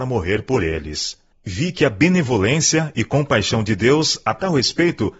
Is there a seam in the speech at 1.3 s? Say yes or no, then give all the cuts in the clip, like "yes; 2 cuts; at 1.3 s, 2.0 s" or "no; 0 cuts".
yes; 1 cut; at 1.3 s